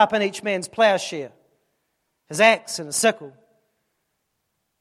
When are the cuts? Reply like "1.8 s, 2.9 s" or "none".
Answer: none